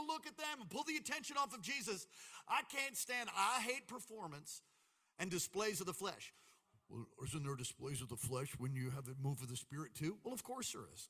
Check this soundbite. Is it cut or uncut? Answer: uncut